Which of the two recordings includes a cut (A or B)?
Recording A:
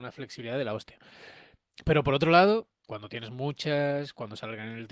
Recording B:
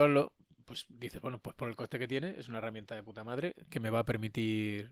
A